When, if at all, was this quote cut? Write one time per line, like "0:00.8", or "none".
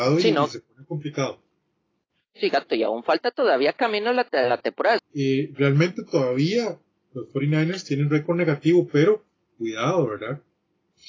0:05.0

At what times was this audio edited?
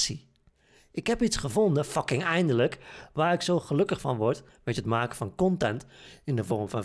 none

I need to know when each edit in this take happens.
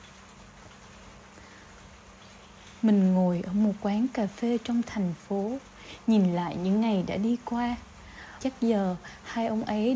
0:08.4

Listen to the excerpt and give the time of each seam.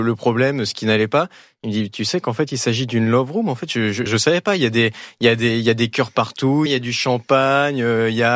0:04.1
0:06.7

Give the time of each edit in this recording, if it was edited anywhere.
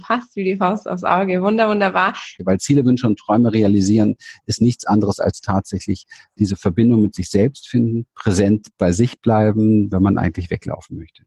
0:02.4
0:09.9

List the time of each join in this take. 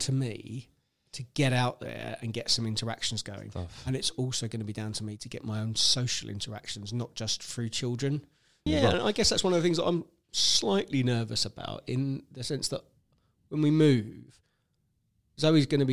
0:08.7

